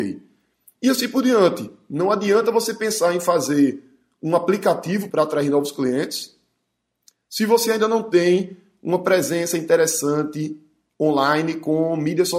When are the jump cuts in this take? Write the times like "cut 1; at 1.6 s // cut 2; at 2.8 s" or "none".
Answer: cut 1; at 5.1 s